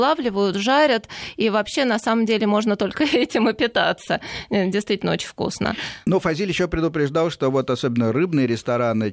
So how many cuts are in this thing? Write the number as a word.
one